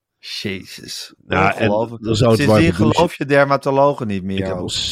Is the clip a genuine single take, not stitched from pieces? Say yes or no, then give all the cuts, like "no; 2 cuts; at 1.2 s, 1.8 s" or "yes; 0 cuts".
yes; 0 cuts